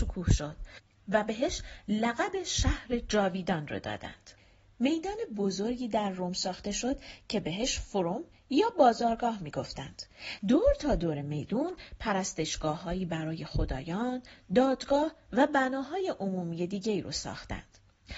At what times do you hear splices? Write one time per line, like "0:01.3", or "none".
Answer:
0:10.4